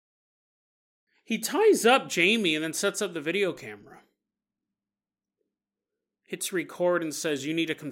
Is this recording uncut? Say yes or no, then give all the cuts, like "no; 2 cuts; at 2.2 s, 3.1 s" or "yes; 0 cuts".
yes; 0 cuts